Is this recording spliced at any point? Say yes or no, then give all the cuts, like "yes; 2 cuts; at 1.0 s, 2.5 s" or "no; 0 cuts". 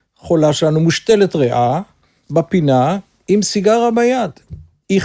no; 0 cuts